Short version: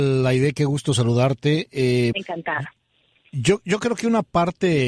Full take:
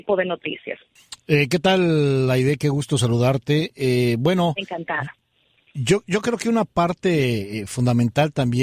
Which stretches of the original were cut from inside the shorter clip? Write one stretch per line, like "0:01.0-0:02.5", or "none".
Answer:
0:04.2-0:04.5